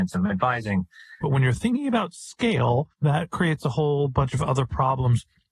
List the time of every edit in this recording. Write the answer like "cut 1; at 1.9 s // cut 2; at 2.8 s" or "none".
cut 1; at 1.2 s // cut 2; at 2.9 s

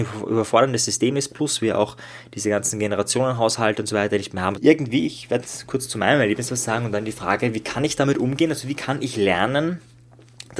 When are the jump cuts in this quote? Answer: cut 1; at 4.5 s

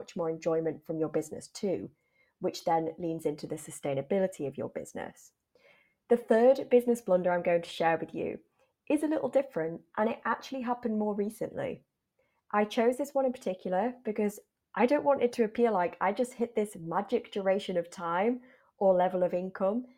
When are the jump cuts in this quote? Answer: none

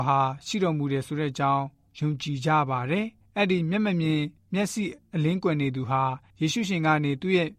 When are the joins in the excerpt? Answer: none

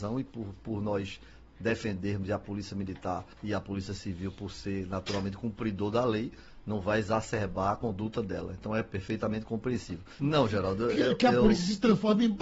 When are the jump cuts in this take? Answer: cut 1; at 3.3 s // cut 2; at 10.2 s

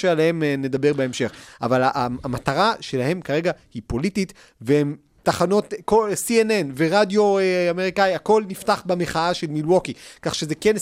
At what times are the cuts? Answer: cut 1; at 5.2 s

